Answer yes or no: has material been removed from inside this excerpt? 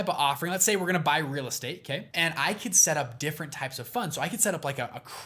no